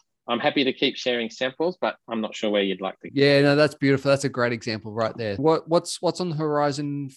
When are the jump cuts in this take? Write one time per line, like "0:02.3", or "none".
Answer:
0:03.1
0:05.4